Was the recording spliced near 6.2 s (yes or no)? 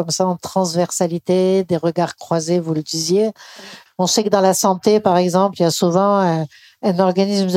no